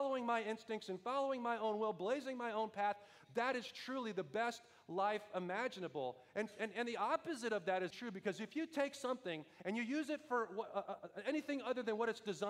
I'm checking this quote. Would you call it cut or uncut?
cut